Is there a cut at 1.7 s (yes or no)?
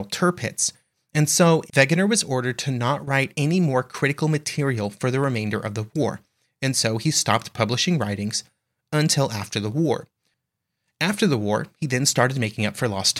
yes